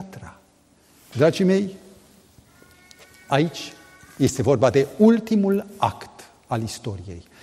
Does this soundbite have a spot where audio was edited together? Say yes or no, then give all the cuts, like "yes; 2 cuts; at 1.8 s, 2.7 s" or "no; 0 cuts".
yes; 1 cut; at 1.1 s